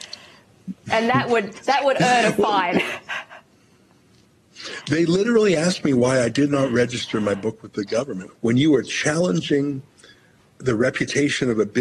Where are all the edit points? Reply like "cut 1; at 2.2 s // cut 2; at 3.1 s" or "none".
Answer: cut 1; at 8.3 s